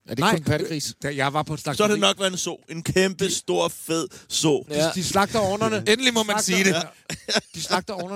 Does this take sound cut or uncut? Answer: uncut